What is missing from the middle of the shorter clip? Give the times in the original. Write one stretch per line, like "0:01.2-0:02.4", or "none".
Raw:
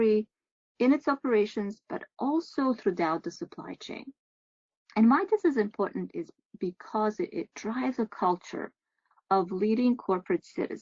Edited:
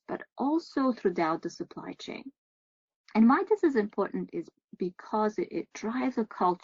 none